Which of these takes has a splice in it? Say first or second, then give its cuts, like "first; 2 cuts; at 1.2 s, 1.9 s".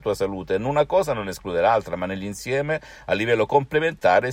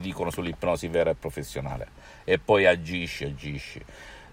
second; 1 cut; at 3.2 s